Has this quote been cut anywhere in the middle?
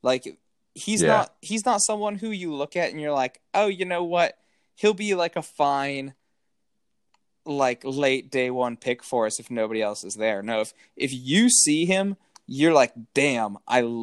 no; 0 cuts

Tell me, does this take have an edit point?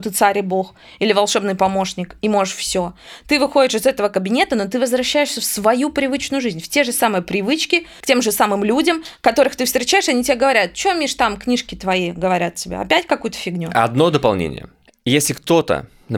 yes; 2 cuts; at 8.0 s, 14.9 s

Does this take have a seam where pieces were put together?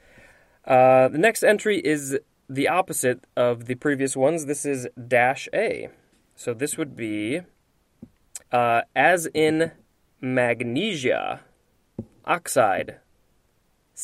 yes; 2 cuts; at 8.4 s, 12.2 s

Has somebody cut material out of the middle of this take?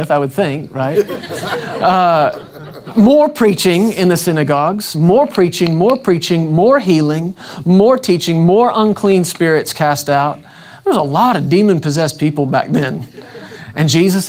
no; 0 cuts

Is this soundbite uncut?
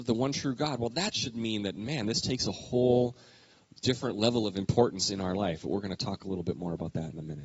yes; 0 cuts

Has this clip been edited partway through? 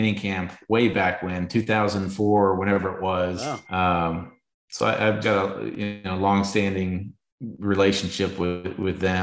yes; 2 cuts; at 3.6 s, 5.2 s

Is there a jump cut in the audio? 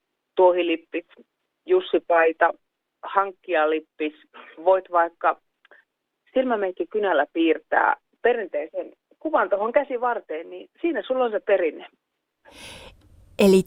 no; 0 cuts

